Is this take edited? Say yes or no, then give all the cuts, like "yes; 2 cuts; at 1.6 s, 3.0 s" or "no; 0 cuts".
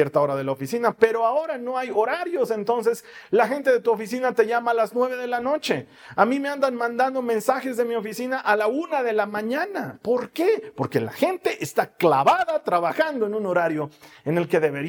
no; 0 cuts